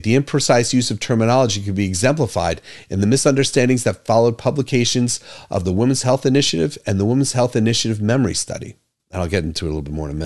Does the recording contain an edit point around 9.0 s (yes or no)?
yes